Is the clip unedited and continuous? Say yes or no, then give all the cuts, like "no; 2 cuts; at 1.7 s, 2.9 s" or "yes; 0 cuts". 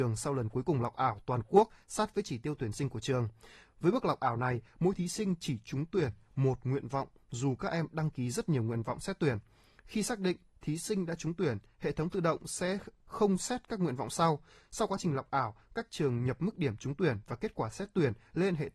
yes; 0 cuts